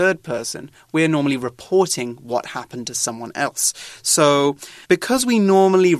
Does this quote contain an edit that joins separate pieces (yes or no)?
yes